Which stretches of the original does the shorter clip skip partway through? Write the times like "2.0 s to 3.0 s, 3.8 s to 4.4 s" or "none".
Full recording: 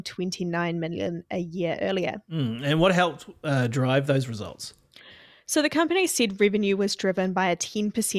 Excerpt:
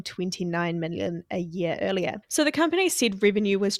2.2 s to 5.4 s